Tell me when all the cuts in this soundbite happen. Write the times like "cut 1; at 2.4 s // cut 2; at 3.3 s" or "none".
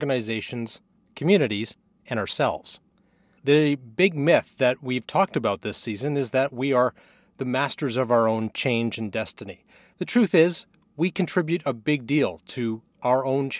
cut 1; at 3.4 s